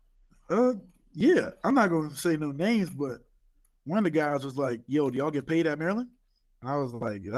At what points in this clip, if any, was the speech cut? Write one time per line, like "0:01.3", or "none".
none